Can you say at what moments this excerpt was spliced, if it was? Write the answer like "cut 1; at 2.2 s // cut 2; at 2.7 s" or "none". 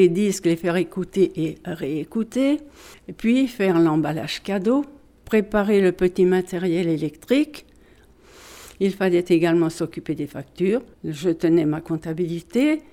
none